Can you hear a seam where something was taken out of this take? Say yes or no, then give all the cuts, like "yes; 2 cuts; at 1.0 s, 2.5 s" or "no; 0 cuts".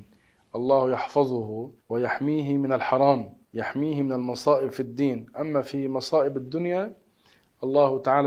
yes; 2 cuts; at 1.8 s, 3.4 s